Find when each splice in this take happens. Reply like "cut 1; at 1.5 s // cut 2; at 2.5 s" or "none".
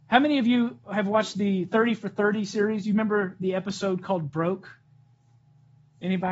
none